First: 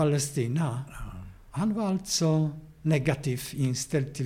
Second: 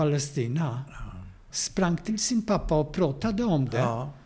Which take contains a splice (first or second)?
second